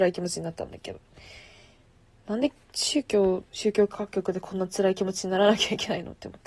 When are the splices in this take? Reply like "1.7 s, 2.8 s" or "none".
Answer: 3.5 s